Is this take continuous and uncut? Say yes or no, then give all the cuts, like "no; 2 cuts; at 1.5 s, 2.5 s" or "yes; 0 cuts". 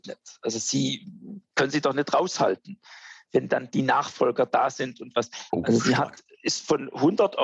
no; 1 cut; at 5.5 s